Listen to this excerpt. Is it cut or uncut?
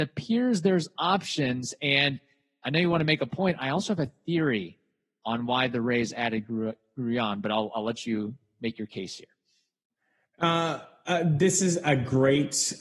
uncut